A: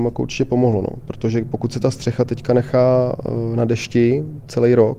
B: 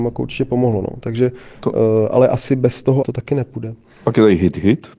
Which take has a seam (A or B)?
B